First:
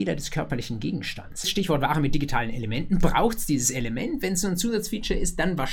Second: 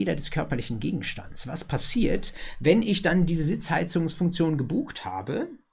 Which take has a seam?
first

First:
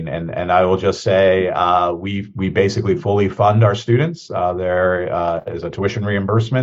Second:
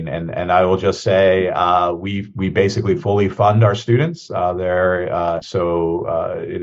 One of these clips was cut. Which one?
second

